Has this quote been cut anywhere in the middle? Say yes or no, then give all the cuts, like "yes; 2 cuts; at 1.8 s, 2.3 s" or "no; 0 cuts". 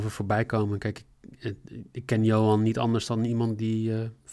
no; 0 cuts